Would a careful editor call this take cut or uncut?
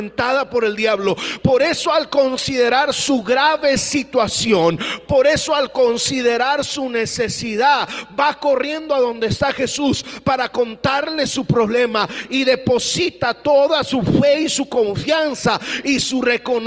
uncut